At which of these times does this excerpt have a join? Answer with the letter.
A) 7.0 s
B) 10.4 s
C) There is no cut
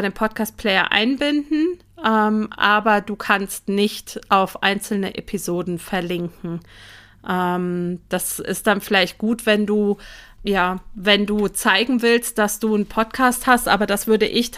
B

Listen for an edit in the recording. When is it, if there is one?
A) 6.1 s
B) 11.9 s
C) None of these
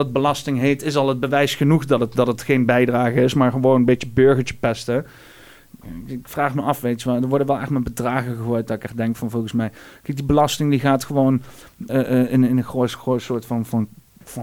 B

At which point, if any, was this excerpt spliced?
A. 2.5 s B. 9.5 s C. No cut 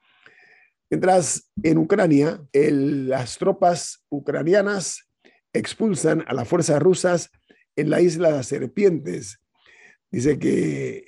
A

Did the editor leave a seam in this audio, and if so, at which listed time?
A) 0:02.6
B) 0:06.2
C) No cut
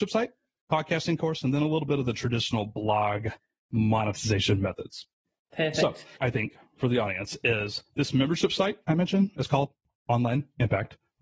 B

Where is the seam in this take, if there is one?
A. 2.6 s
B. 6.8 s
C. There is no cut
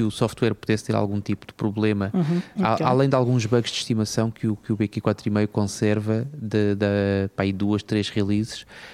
A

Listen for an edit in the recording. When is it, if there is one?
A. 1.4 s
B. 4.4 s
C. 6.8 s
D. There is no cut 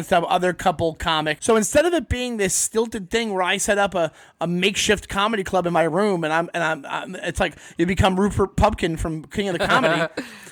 A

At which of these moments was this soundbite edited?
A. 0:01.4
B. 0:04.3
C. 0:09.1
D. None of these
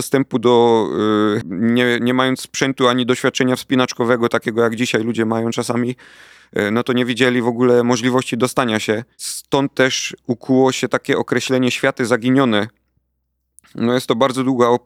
A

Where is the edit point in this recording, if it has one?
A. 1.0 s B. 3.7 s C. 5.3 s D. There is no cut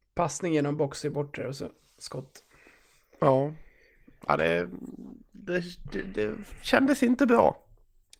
D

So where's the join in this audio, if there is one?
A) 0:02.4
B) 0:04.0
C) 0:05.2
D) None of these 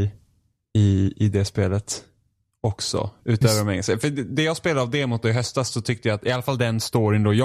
D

